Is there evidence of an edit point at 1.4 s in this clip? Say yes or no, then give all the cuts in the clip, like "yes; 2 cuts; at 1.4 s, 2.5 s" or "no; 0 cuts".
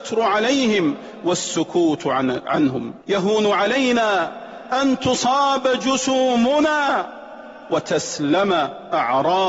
no; 1 cut; at 3.0 s